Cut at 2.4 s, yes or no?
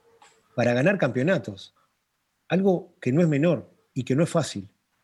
no